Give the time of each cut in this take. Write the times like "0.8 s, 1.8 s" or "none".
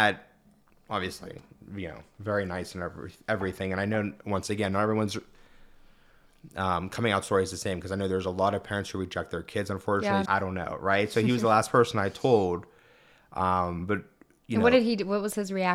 10.2 s